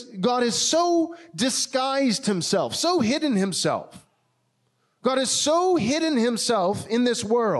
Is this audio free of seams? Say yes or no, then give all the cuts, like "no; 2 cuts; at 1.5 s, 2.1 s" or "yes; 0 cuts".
yes; 0 cuts